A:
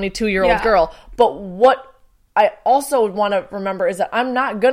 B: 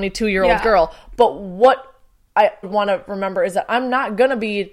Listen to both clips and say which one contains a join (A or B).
B